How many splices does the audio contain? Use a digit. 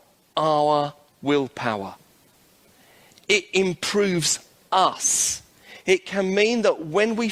0